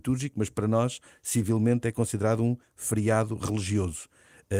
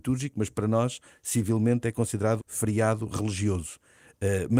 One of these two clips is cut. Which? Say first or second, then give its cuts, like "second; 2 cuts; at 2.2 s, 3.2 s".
second; 1 cut; at 2.4 s